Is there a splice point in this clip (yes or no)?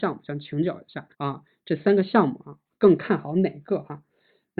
yes